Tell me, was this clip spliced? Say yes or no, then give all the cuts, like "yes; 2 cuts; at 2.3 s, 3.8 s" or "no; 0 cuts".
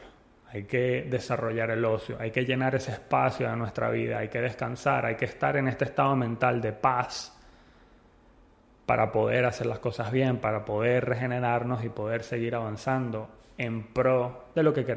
no; 0 cuts